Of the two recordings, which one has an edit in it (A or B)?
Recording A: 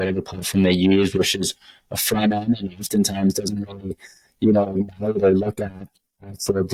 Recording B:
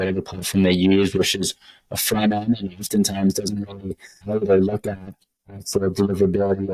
B